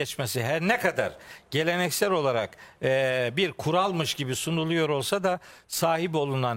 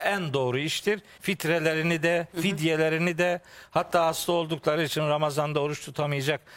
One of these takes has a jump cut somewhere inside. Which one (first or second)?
second